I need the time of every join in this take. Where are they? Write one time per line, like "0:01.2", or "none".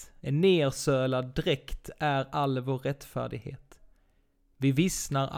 none

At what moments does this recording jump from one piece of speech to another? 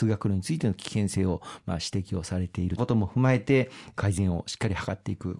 0:02.8

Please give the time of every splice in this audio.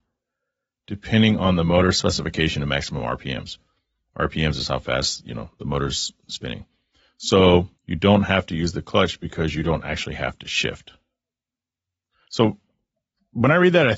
0:07.8

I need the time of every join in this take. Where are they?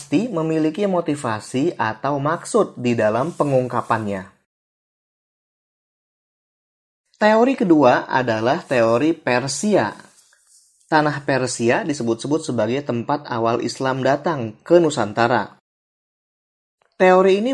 none

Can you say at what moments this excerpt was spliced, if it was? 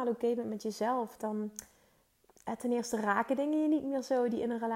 0:01.2

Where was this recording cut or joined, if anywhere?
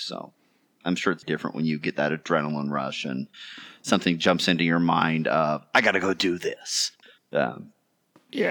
0:01.2

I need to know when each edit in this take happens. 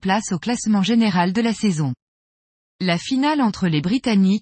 0:02.7

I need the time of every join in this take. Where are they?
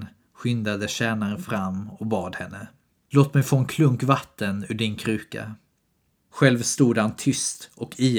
0:06.3

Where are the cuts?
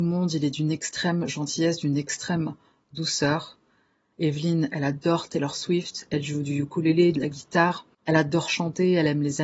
0:04.1
0:07.1

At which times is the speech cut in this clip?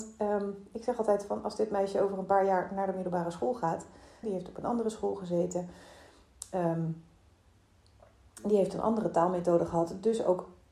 0:04.2

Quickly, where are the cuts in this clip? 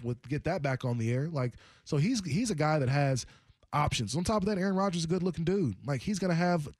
none

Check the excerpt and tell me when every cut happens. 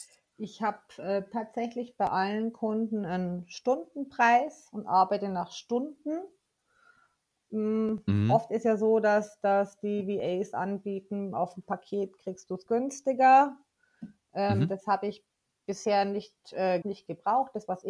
0:16.8

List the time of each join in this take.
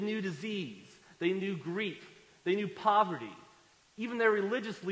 none

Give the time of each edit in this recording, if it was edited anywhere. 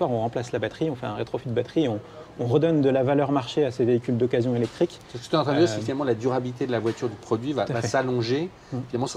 none

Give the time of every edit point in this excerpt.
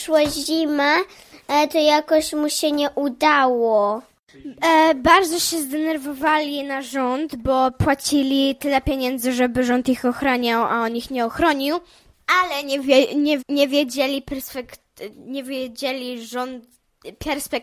0:13.4

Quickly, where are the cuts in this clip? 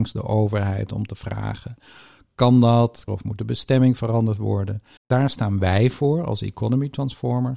0:03.1
0:05.0

